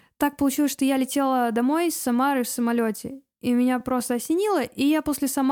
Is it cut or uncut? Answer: uncut